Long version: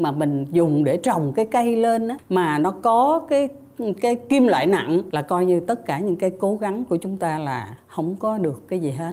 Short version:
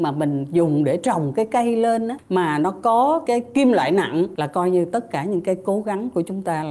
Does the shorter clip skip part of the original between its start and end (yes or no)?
yes